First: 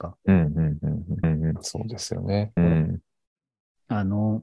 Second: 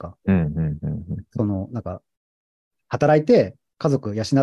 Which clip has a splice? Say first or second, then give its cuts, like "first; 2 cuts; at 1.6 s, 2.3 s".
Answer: first; 2 cuts; at 1.2 s, 2.6 s